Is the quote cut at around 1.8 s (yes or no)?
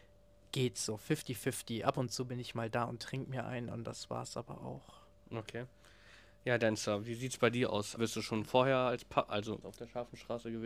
no